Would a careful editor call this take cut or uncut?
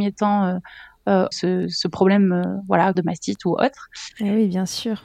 cut